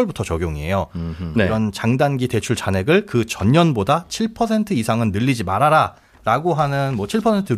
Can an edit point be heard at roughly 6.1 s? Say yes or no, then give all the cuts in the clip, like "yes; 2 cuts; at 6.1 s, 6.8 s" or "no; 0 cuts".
no; 1 cut; at 1.4 s